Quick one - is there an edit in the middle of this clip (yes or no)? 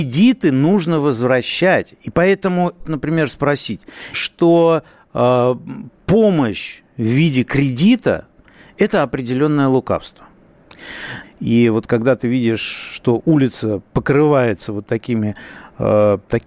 yes